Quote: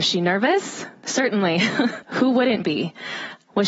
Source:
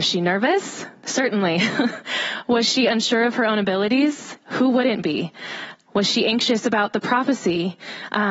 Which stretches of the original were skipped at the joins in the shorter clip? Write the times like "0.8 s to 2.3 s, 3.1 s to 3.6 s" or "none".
2.0 s to 4.4 s